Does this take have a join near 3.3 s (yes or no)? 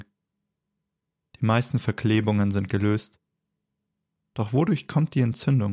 no